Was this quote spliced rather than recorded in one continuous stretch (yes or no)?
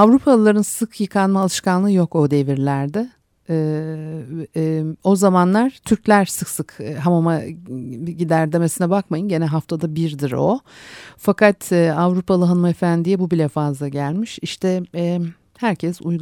no